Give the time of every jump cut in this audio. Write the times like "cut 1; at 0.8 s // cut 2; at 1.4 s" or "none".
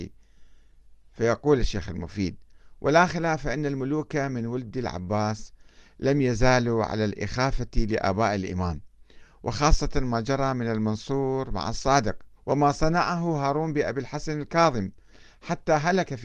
cut 1; at 12.4 s